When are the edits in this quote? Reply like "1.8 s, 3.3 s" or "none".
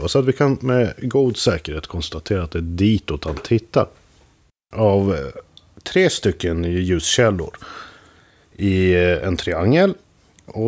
4.7 s